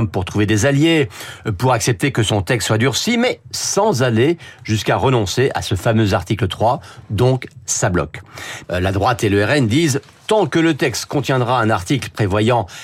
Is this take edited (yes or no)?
yes